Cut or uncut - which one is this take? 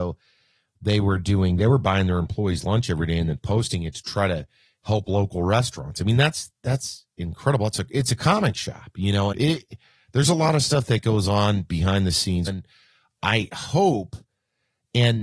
cut